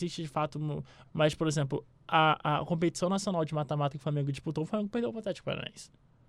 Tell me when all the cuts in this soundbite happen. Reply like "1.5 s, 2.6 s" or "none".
1.0 s